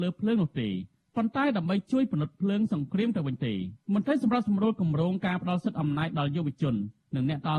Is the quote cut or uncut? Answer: cut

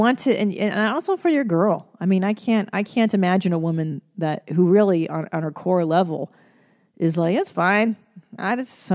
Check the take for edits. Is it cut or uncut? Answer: uncut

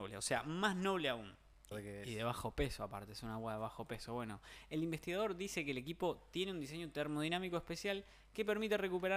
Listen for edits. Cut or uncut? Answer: cut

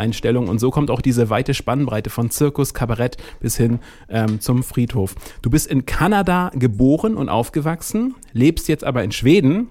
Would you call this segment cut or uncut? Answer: uncut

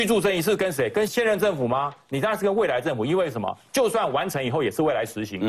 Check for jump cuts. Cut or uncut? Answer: cut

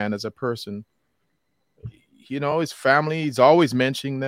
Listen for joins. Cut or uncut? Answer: uncut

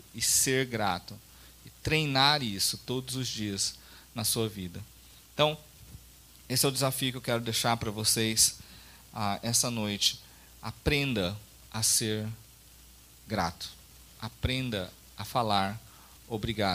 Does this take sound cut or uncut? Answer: uncut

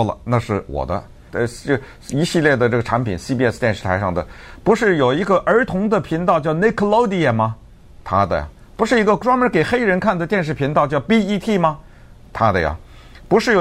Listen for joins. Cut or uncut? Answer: cut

